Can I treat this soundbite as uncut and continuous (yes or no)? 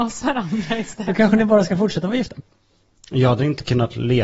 no